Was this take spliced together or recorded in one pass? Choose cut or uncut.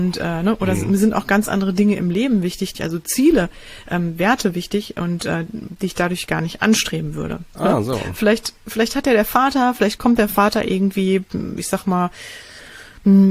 cut